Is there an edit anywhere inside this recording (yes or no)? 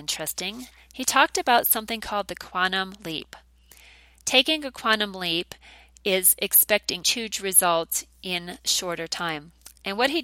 yes